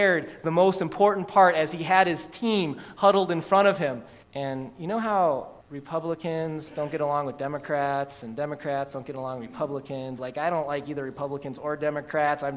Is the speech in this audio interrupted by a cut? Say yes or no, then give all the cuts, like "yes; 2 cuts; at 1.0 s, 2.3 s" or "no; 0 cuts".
yes; 3 cuts; at 4.2 s, 5.6 s, 10.2 s